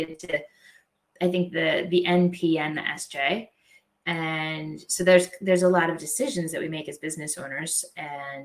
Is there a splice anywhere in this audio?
no; 0 cuts

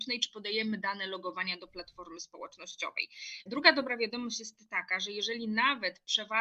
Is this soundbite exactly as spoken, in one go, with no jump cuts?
no; 1 cut; at 3.5 s

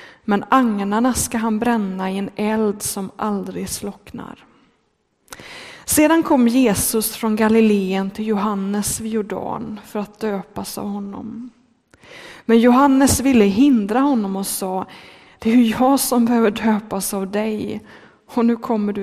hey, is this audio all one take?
yes; 0 cuts

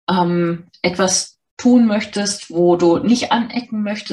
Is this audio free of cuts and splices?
yes; 0 cuts

